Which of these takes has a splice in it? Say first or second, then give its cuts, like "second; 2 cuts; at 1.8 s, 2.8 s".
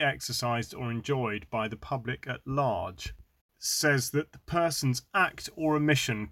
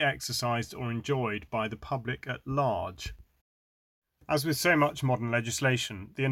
first; 1 cut; at 3.5 s